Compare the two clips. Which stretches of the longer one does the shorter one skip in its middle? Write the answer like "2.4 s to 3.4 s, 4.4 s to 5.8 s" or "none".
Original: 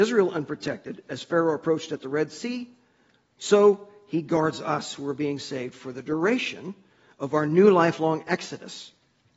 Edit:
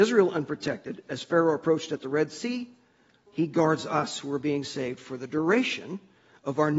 3.3 s to 4.0 s

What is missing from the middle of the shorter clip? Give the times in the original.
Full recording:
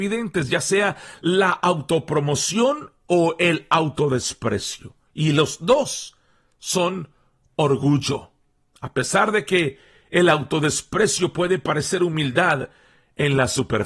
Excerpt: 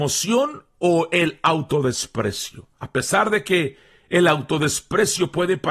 5.1 s to 8.8 s

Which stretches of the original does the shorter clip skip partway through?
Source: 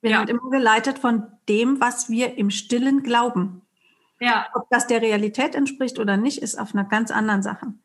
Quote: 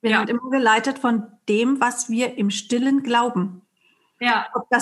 none

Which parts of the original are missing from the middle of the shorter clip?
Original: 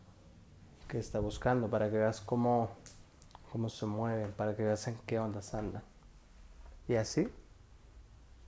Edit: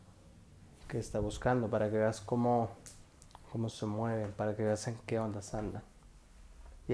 none

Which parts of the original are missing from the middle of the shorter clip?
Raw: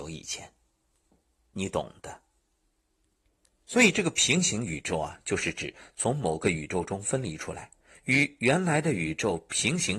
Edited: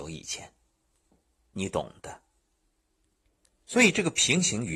none

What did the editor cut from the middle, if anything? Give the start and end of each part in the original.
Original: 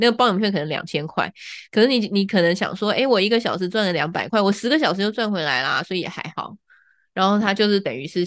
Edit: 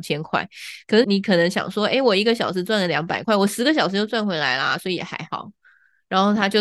1.9 s to 2.1 s

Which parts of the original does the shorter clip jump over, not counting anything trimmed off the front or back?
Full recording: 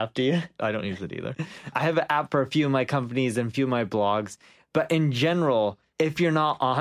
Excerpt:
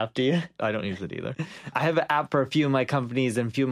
none

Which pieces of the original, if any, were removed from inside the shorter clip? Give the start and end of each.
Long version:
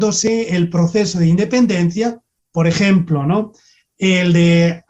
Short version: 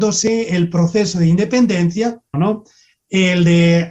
2.3 s to 3.2 s

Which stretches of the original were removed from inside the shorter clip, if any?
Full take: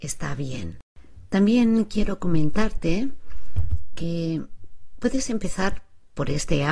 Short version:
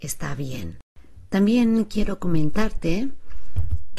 none

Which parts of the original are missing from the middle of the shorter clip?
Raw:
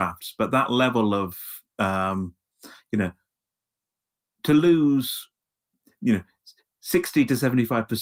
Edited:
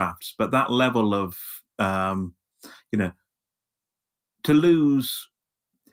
none

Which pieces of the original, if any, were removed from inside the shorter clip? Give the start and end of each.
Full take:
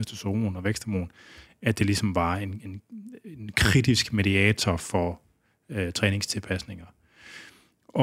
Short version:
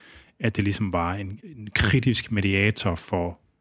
2.6 s to 3.2 s

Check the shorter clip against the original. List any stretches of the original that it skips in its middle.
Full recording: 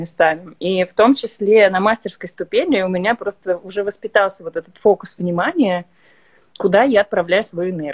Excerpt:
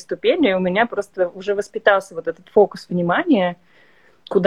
none

